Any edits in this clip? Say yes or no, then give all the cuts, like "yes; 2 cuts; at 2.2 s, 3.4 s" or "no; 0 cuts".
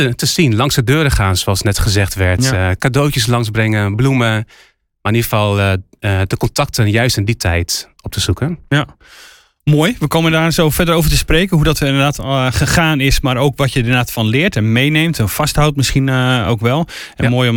no; 0 cuts